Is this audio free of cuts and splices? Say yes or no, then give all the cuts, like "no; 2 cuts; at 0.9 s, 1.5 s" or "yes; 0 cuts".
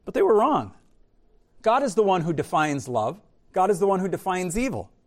no; 1 cut; at 3.4 s